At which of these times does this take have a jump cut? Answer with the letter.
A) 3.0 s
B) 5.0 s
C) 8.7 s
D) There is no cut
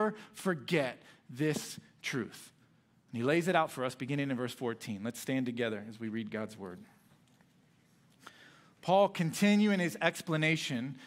D